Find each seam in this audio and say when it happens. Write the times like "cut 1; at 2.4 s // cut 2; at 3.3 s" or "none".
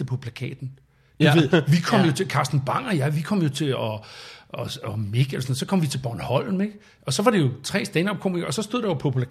none